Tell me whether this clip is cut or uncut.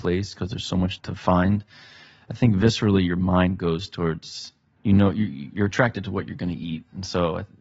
cut